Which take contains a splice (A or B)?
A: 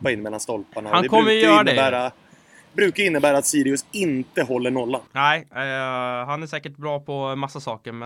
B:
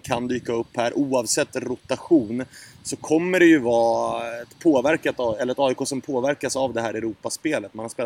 A